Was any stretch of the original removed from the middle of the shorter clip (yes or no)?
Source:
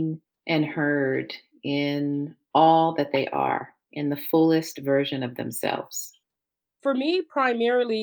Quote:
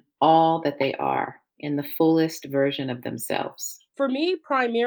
yes